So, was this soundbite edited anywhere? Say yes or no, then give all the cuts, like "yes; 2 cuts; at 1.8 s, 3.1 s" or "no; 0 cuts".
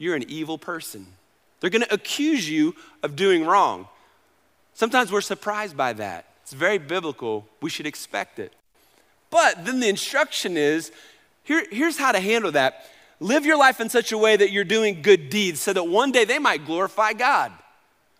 no; 0 cuts